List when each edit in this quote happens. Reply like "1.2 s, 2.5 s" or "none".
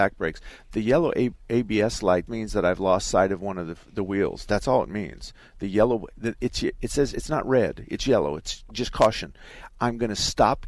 2.3 s